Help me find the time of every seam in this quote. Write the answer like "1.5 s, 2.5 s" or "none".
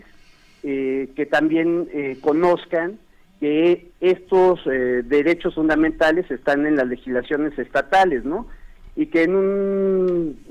none